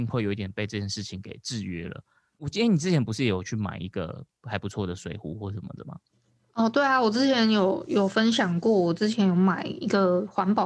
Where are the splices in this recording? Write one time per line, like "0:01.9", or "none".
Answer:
0:02.3